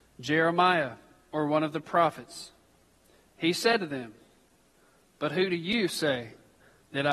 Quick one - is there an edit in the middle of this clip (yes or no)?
no